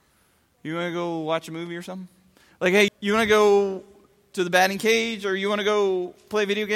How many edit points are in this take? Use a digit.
1